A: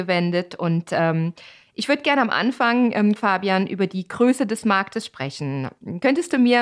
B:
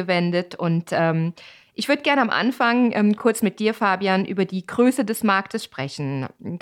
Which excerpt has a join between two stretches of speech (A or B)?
A